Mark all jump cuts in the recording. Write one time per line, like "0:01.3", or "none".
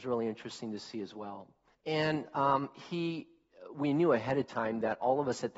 0:01.7